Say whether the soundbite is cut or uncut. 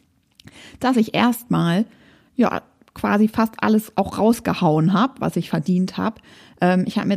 uncut